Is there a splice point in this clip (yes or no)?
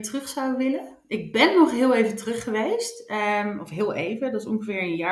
no